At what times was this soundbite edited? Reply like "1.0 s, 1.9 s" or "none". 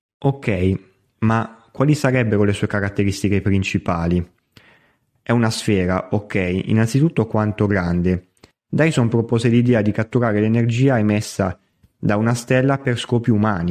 8.5 s